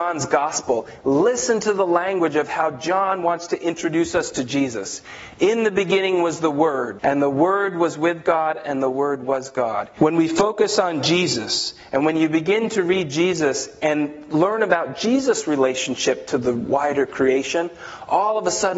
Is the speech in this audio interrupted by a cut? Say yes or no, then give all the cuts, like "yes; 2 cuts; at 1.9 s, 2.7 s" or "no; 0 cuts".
yes; 2 cuts; at 7.0 s, 10.0 s